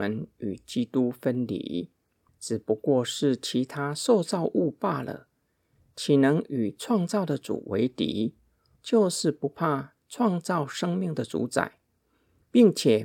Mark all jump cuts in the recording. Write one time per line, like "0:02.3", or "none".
0:02.3
0:08.8